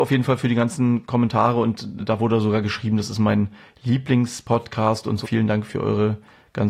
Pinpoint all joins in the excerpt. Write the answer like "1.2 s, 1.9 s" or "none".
2.0 s, 5.2 s